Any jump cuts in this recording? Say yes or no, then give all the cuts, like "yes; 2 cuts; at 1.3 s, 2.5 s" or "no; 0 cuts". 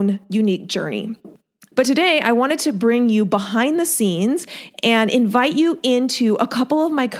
yes; 1 cut; at 1.7 s